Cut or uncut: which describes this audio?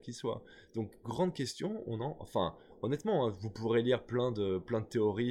uncut